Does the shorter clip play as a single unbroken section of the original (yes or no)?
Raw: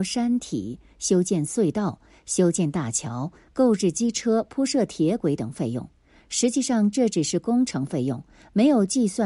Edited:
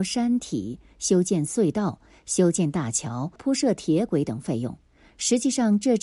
no